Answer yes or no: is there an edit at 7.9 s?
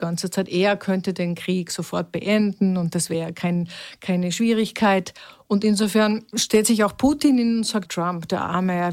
yes